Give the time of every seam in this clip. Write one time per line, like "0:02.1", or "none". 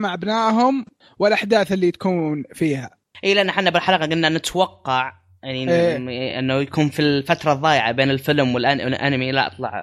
none